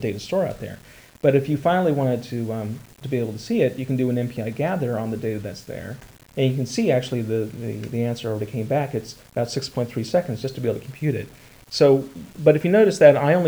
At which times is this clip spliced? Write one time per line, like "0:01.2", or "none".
0:06.3